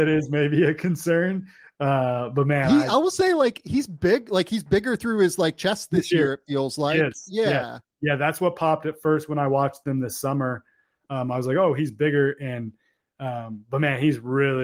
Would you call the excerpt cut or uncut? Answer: uncut